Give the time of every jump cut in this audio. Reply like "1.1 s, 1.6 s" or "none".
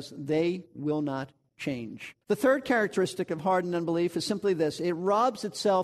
2.2 s